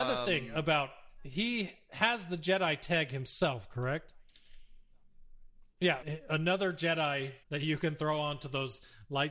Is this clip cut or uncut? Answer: cut